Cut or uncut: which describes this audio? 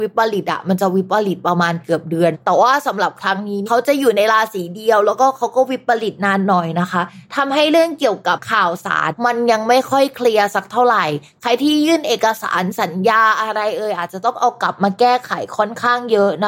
uncut